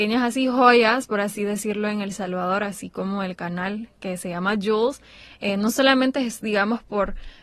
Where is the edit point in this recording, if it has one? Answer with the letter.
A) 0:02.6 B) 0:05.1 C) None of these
C